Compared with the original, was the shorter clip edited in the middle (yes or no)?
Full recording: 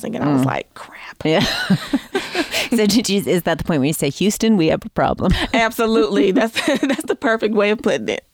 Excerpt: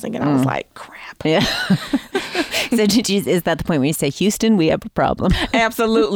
no